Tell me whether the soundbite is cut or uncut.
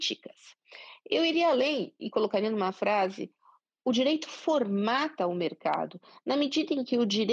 cut